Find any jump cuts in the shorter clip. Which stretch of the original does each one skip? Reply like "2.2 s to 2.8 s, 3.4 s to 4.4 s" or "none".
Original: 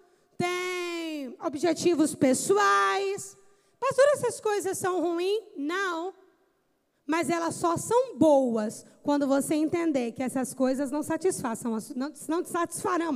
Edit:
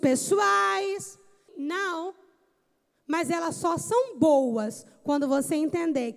3.7 s to 5.5 s